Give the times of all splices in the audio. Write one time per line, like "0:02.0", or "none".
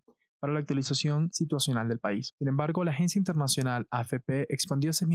none